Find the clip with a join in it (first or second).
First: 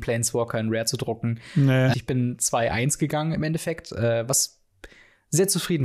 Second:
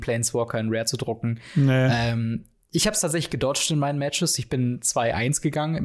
first